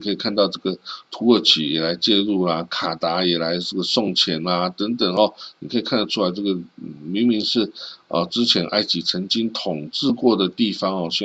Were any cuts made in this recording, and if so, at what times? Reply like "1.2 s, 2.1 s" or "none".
none